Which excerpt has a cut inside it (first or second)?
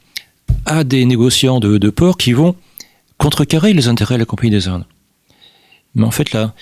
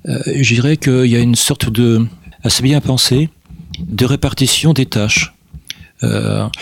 second